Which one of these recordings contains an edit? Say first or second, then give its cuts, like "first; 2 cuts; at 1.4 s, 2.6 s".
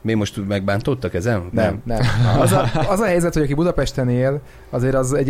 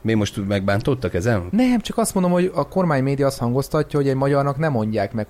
first; 1 cut; at 1.5 s